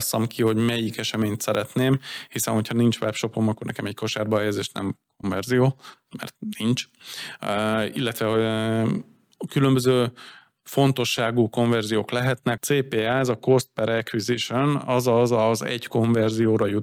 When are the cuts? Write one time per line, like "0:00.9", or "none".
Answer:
0:12.6